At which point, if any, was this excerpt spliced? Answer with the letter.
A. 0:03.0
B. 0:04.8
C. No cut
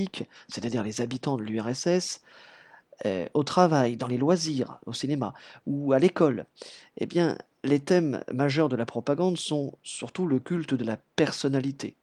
C